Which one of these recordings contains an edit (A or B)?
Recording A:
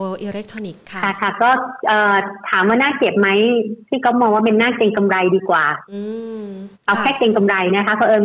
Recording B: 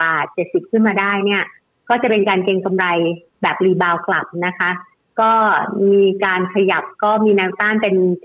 A